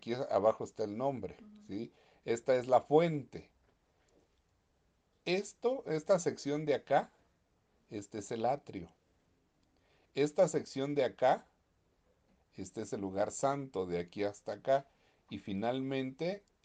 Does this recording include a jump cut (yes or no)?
no